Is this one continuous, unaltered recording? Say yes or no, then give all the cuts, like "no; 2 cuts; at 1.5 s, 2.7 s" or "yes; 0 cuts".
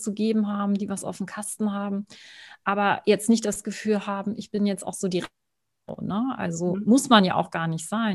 yes; 0 cuts